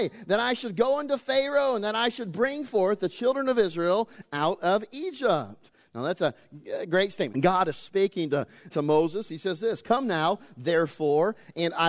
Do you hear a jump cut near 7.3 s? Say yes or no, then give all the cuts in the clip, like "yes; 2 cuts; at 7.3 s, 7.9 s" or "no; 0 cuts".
yes; 2 cuts; at 7.3 s, 8.7 s